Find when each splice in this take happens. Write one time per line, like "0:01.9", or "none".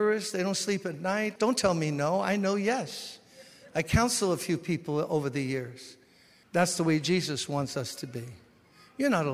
0:01.4
0:06.4